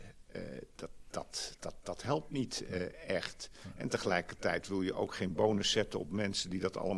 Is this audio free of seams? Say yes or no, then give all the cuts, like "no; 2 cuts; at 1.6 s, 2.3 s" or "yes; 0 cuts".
no; 1 cut; at 1.6 s